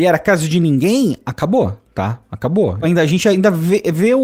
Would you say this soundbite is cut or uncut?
cut